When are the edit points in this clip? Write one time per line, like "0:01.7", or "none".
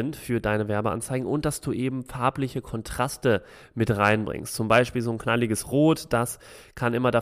none